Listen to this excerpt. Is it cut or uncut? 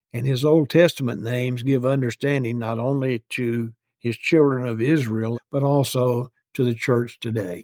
cut